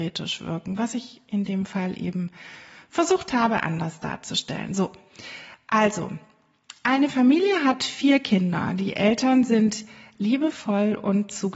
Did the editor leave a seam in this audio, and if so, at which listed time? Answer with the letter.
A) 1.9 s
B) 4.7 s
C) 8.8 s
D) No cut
D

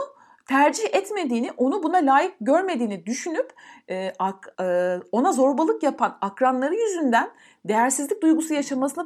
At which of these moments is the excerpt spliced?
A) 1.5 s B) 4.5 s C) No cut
B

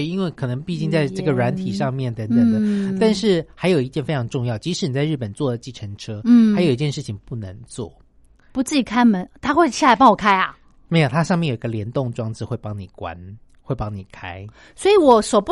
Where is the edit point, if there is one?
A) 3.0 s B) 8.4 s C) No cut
B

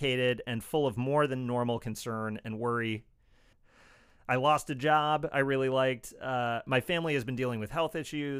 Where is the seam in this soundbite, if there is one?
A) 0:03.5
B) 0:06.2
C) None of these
A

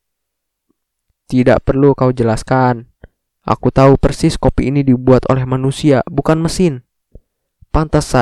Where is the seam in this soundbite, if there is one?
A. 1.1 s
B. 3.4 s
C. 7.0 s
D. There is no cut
A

